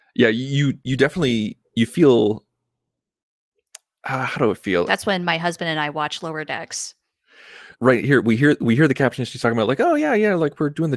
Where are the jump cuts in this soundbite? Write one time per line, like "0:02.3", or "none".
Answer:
0:04.9
0:07.7